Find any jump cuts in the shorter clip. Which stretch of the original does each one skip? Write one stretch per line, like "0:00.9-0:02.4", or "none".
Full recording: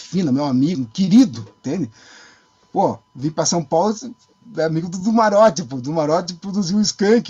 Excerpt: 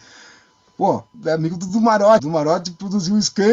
0:03.1-0:04.5
0:05.5-0:05.8